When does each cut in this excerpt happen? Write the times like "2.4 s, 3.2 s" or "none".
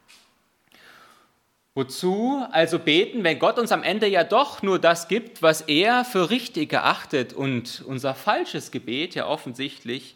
none

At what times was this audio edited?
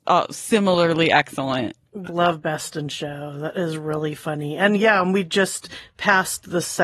2.0 s

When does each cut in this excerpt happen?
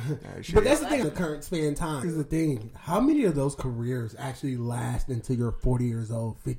1.0 s, 2.0 s

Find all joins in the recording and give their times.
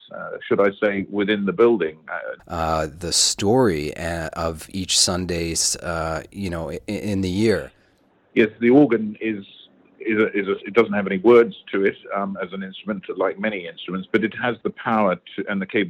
2.4 s

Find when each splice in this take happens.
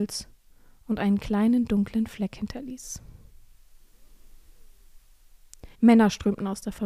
5.7 s

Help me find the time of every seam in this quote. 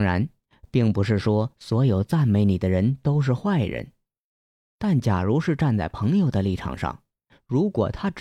none

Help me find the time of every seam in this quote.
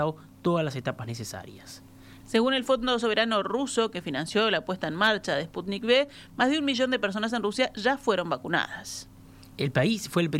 2.2 s

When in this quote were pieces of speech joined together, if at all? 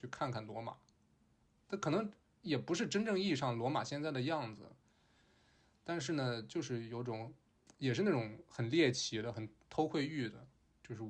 none

